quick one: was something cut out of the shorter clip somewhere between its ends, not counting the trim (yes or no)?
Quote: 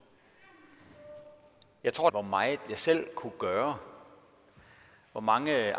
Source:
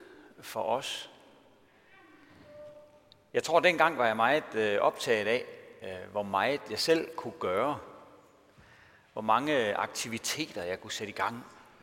yes